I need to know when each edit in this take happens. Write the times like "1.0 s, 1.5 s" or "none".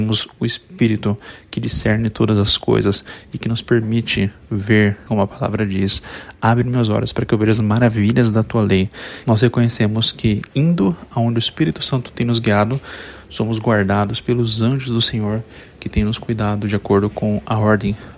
5.1 s, 9.2 s